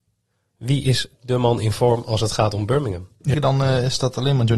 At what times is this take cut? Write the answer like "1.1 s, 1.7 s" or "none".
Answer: 3.3 s